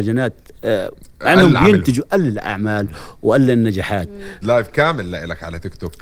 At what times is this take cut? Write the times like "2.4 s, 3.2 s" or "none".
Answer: 4.4 s